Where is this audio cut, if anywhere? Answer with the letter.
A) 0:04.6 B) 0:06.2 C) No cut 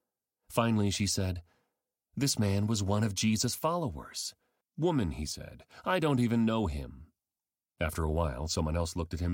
A